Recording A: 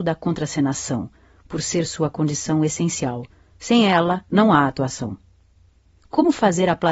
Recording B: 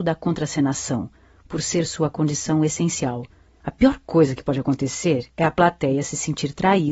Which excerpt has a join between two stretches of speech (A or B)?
B